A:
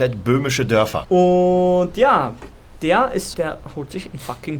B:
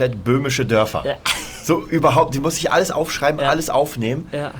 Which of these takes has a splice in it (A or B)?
A